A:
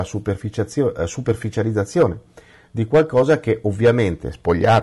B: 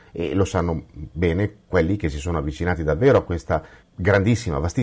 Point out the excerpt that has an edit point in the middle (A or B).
B